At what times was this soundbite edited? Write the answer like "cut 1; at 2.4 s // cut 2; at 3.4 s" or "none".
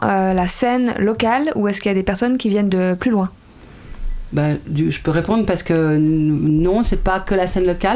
none

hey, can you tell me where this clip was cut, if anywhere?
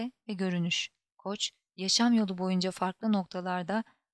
cut 1; at 1.1 s

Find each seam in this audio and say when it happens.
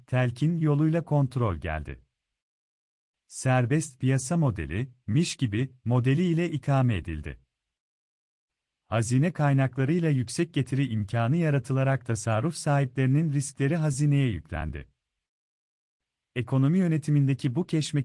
none

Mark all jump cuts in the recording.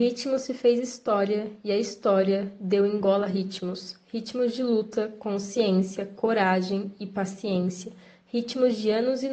none

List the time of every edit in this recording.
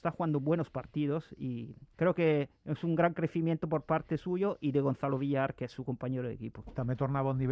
none

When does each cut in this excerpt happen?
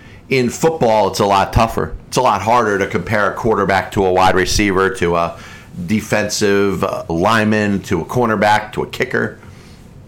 cut 1; at 7.1 s

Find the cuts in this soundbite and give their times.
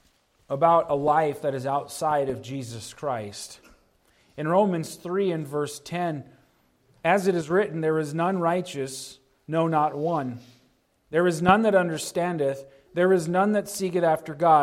none

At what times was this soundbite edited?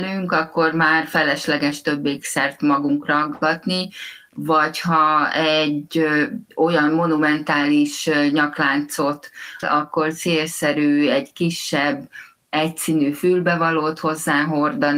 cut 1; at 6.5 s // cut 2; at 9.6 s

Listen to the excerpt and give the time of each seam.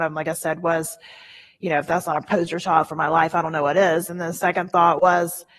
none

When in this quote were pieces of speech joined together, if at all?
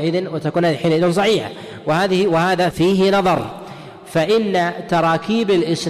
cut 1; at 2.7 s

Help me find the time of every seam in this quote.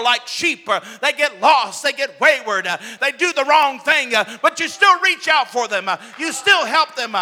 cut 1; at 3.0 s

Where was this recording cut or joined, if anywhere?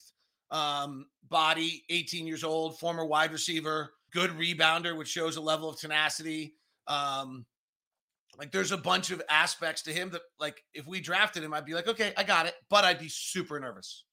cut 1; at 4.1 s

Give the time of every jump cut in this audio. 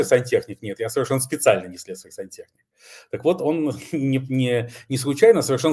none

